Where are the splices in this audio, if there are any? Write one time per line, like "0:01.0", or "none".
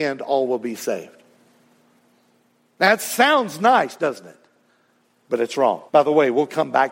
0:05.9